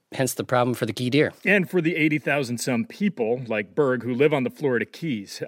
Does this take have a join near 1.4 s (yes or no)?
no